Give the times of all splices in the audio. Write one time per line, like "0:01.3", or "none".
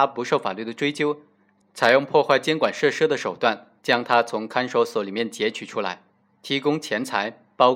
none